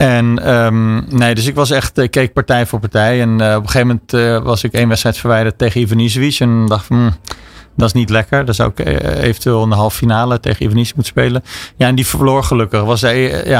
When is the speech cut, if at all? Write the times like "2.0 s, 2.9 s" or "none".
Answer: 10.4 s